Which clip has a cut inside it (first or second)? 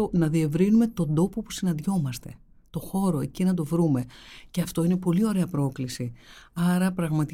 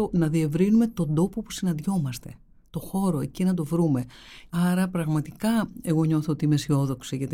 second